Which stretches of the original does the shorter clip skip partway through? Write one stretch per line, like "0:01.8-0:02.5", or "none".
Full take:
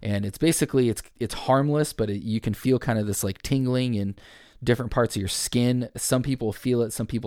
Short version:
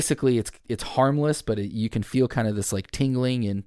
none